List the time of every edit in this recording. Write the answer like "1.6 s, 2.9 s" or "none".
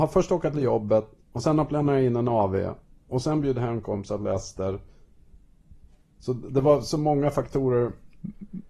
none